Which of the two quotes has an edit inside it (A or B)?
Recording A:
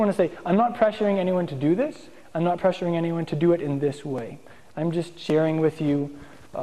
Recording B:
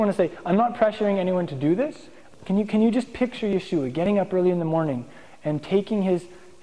B